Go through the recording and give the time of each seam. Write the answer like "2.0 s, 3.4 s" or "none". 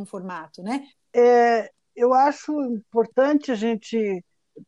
0.9 s